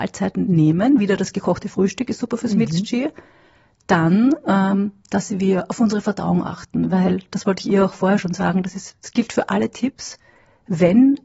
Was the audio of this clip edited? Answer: no; 0 cuts

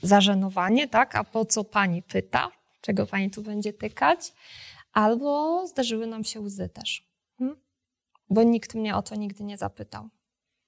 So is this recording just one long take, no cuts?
yes; 0 cuts

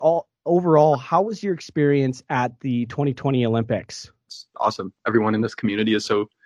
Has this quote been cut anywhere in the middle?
yes; 1 cut; at 4.3 s

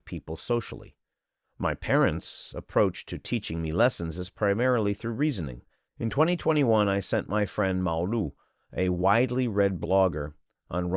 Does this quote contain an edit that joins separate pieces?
yes; 2 cuts; at 1.4 s, 5.9 s

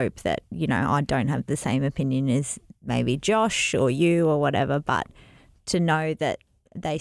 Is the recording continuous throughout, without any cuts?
yes; 0 cuts

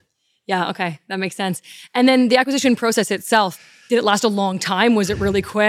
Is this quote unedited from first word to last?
yes; 0 cuts

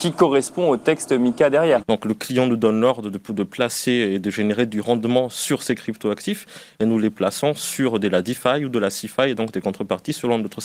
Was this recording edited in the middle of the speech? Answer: yes; 1 cut; at 1.8 s

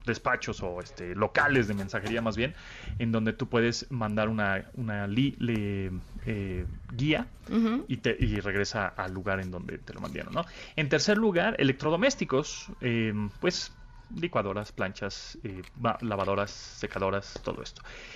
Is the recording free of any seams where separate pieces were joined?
yes; 0 cuts

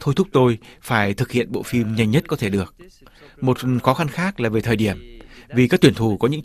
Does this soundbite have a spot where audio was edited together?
no; 0 cuts

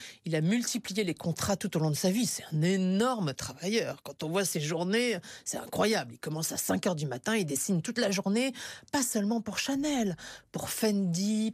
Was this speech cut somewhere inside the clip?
no; 0 cuts

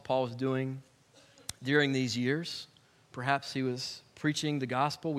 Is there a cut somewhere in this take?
no; 0 cuts

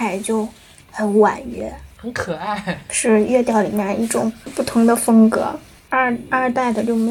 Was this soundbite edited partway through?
yes; 1 cut; at 5.9 s

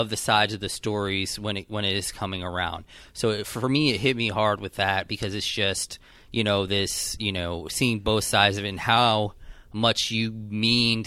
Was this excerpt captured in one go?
yes; 0 cuts

